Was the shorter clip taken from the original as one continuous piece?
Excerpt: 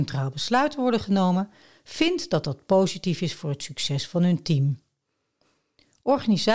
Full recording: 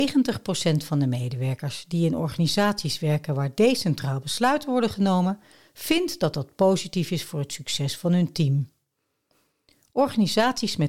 yes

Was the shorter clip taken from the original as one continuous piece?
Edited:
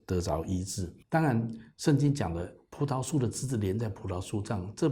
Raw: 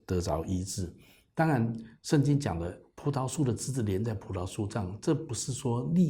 no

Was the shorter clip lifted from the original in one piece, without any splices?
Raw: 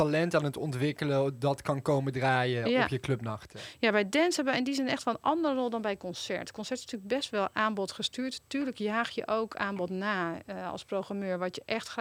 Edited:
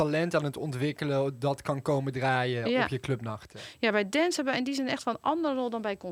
yes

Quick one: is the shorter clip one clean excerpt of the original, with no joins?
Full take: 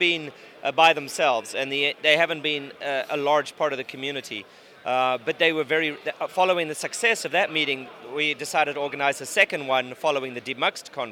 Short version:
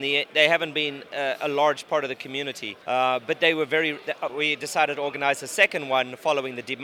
no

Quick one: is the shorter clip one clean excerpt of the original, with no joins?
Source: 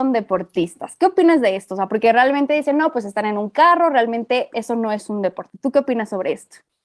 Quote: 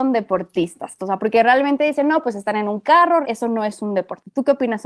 no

